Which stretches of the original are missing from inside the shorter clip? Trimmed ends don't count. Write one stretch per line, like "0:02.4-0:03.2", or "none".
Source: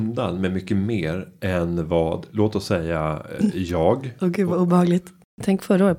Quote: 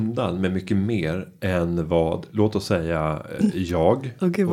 none